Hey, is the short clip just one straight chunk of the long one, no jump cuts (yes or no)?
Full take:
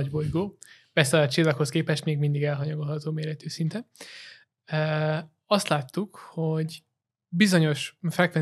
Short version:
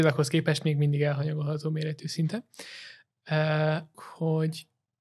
no